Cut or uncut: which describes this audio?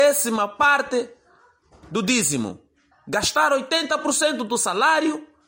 cut